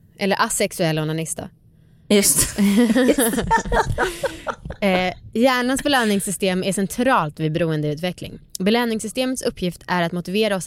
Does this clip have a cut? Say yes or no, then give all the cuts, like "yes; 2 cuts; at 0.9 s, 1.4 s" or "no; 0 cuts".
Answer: no; 0 cuts